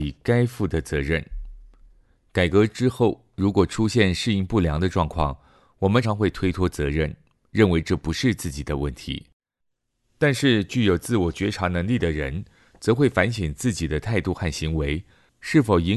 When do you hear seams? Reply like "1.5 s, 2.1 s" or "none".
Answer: 6.0 s